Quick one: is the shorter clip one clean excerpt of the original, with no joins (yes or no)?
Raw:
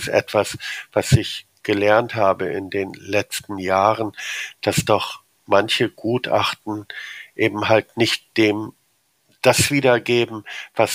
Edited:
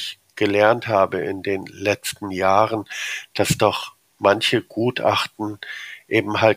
yes